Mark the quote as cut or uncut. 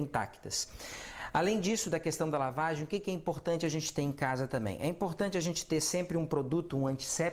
uncut